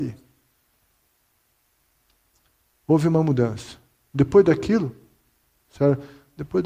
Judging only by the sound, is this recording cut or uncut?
uncut